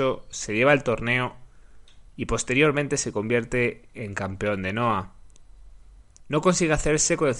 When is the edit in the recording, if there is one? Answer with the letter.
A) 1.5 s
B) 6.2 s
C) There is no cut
B